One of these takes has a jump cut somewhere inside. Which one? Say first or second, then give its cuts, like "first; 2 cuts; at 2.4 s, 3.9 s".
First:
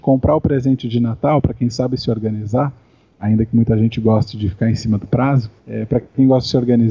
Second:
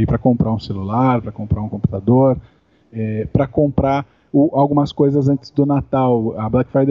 first; 1 cut; at 5.6 s